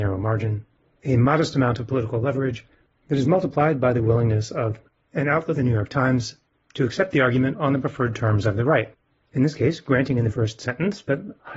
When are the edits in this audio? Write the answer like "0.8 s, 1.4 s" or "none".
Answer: 5.5 s, 10.3 s